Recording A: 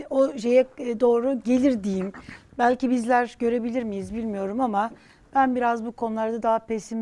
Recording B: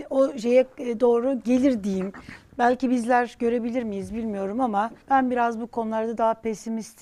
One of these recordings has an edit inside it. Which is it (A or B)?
B